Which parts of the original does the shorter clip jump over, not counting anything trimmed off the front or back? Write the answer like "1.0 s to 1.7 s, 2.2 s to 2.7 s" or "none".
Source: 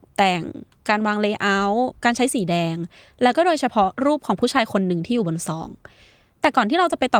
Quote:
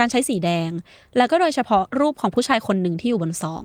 none